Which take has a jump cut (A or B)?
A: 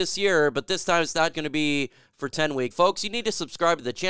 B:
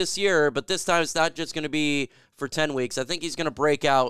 A